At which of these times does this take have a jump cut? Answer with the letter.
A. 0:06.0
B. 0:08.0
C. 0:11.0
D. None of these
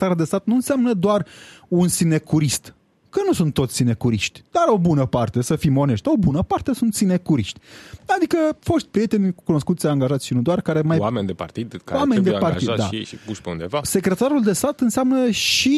A